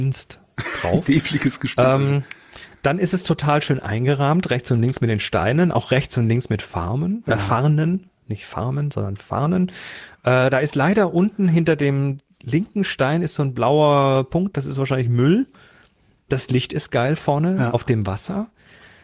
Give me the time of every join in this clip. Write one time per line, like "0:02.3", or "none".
0:16.3